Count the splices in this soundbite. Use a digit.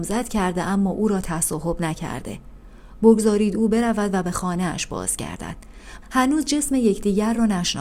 1